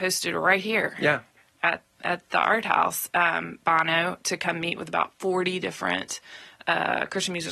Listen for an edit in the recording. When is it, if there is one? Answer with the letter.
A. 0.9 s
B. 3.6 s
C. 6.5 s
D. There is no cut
D